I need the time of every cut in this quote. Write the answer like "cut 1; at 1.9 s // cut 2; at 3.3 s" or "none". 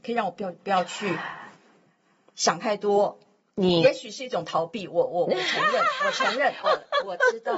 cut 1; at 6.6 s